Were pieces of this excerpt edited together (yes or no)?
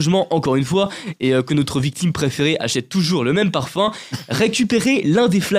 no